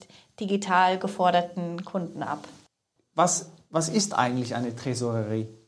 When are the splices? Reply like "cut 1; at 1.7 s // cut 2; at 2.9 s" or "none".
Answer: cut 1; at 3.0 s